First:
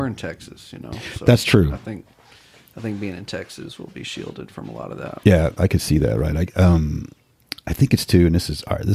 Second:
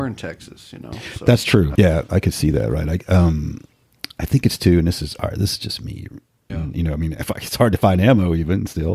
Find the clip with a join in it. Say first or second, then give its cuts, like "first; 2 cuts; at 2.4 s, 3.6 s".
second; 2 cuts; at 1.7 s, 6.5 s